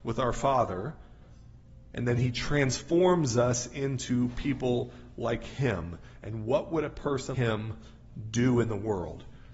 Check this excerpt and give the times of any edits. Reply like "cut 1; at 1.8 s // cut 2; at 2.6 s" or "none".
cut 1; at 7.3 s